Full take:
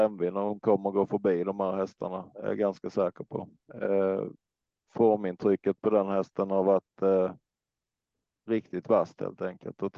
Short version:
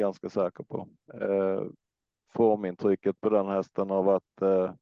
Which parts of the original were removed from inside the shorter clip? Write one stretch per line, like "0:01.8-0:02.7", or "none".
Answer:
none